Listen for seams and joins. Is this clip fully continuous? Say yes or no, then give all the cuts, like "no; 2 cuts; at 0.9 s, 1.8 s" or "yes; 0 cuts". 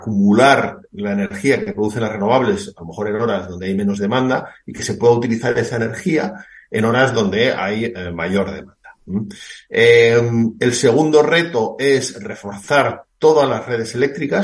yes; 0 cuts